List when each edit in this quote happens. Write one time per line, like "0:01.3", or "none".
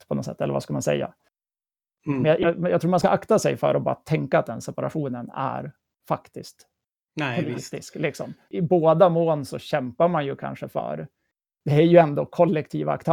none